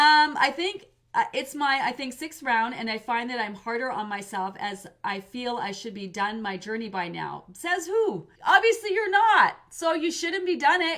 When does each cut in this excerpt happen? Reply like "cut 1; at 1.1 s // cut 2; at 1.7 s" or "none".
cut 1; at 8.4 s

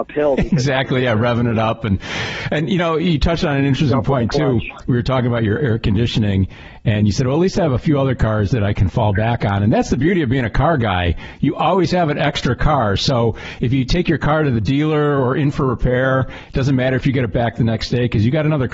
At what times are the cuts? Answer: none

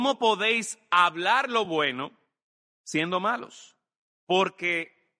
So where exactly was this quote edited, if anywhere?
none

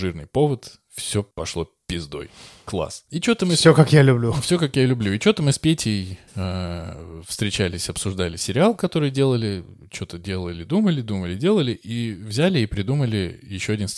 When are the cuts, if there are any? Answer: none

